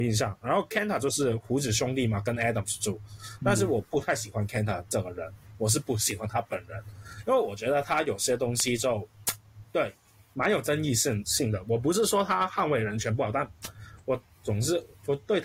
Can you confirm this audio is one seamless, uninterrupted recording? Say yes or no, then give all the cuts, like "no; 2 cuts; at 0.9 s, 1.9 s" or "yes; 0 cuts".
yes; 0 cuts